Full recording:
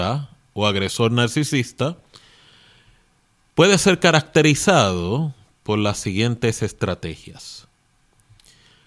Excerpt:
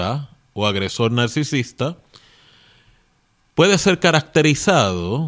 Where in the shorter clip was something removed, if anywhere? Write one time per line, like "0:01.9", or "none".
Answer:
none